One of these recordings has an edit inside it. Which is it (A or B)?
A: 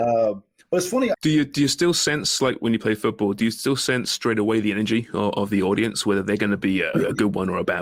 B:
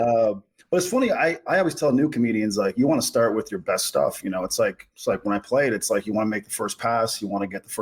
A